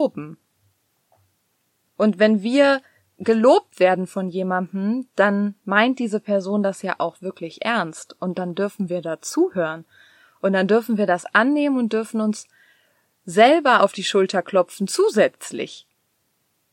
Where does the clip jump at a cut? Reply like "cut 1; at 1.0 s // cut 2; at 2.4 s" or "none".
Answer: cut 1; at 1.9 s